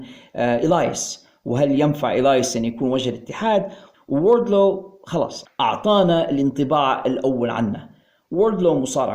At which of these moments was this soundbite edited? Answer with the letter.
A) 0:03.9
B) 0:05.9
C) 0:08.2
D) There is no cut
A